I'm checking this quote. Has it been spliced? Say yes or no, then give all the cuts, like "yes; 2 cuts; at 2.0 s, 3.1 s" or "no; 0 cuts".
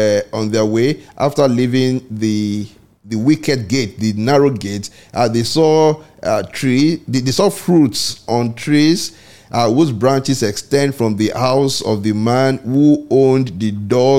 no; 0 cuts